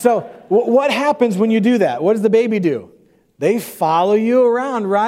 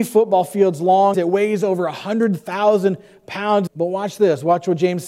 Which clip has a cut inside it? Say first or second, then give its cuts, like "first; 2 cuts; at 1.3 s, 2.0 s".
second; 2 cuts; at 1.1 s, 3.7 s